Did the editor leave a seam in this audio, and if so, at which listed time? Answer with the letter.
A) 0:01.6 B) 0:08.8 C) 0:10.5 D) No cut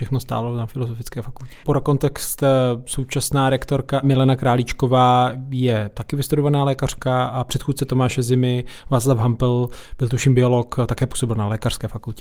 A